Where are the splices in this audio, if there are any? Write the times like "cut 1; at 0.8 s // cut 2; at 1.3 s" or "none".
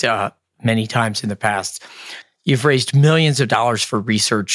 cut 1; at 2.2 s

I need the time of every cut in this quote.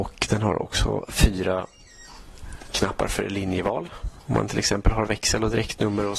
cut 1; at 4.2 s

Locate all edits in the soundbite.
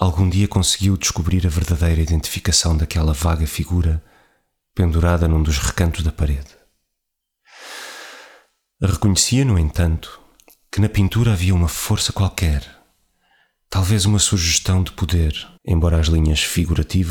cut 1; at 15.6 s

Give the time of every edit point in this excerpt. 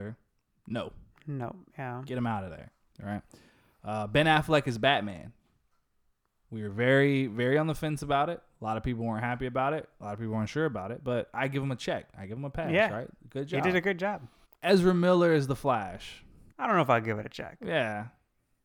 cut 1; at 14.4 s // cut 2; at 16.5 s

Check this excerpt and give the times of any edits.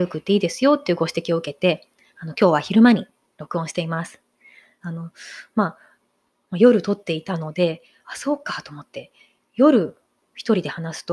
cut 1; at 4.8 s

